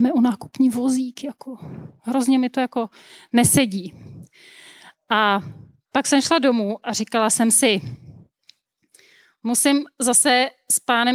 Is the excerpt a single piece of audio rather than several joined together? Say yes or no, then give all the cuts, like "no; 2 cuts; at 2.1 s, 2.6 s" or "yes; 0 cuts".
yes; 0 cuts